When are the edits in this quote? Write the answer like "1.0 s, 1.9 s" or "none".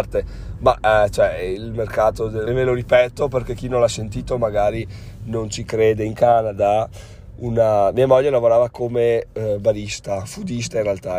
2.5 s